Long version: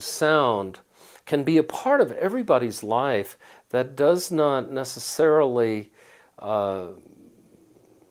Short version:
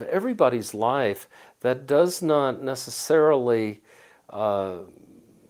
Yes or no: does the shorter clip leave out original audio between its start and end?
no